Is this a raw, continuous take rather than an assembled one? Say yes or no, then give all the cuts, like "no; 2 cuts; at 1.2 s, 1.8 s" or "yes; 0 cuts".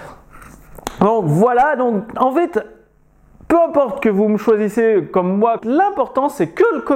no; 1 cut; at 5.6 s